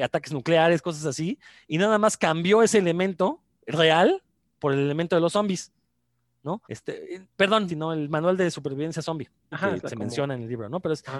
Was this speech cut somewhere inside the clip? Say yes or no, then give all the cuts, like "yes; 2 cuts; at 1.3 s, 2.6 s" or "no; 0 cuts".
yes; 3 cuts; at 6.6 s, 7.7 s, 9.5 s